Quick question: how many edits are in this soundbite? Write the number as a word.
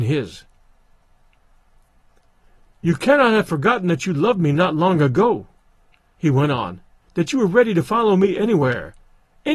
one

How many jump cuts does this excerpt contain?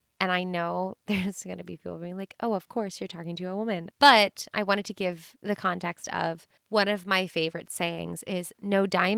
two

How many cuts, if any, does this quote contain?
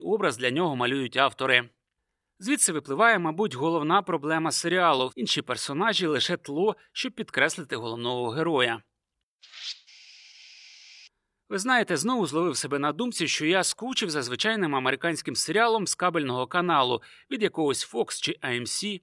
one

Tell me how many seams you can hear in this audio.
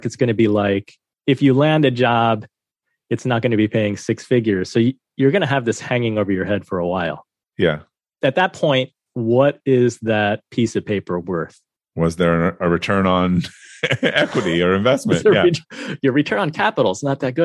two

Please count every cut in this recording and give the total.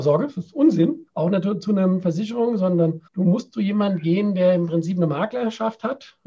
one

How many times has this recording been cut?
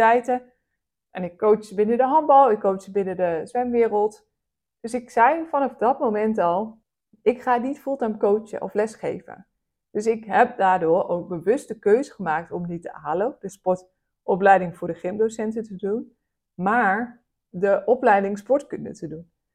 zero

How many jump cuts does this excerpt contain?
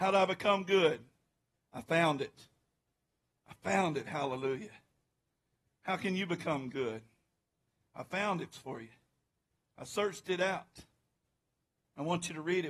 one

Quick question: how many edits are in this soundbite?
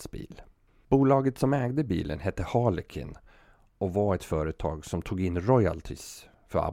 zero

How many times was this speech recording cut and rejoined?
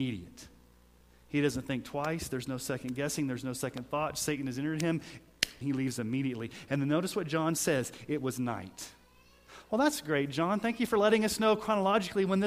one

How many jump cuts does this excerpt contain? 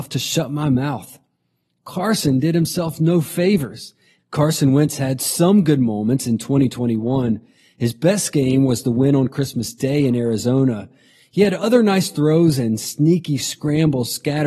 one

